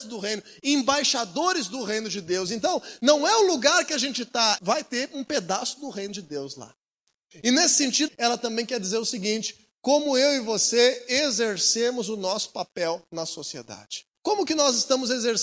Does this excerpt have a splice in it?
yes; 3 cuts; at 4.6 s, 8.1 s, 14.2 s

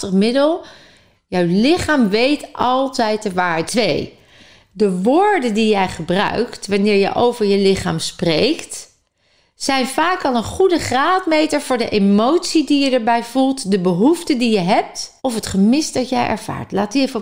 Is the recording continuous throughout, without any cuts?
no; 2 cuts; at 3.7 s, 15.2 s

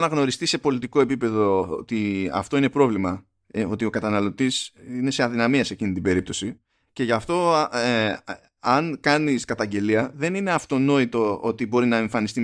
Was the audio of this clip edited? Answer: no; 0 cuts

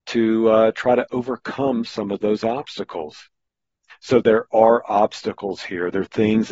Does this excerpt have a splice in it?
yes; 1 cut; at 3.9 s

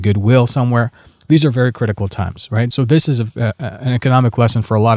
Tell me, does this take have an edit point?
no; 0 cuts

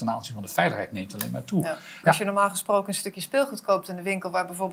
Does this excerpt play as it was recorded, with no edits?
no; 1 cut; at 2.0 s

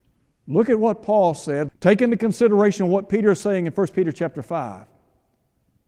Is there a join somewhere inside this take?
yes; 1 cut; at 1.7 s

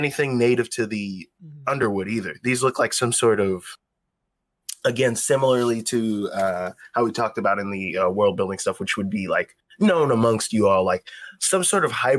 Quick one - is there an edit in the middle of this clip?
no; 0 cuts

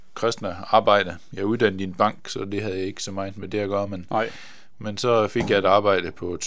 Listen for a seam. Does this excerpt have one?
no; 0 cuts

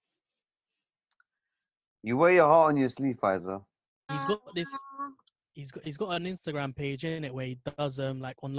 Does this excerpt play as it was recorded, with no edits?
no; 1 cut; at 4.1 s

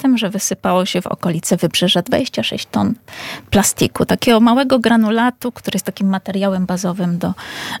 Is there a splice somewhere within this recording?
no; 0 cuts

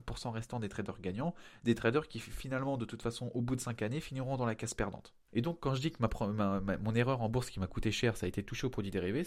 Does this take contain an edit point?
yes; 1 cut; at 5.3 s

